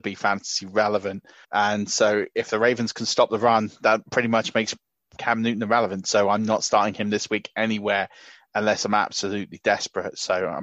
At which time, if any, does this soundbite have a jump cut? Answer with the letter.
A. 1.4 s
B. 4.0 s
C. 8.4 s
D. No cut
A